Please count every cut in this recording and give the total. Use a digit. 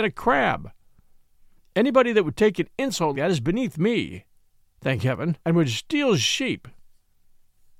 2